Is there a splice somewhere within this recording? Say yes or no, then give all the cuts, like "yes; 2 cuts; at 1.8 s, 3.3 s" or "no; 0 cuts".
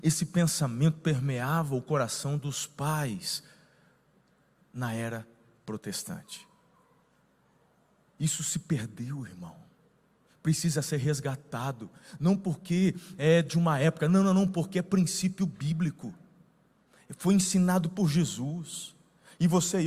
no; 0 cuts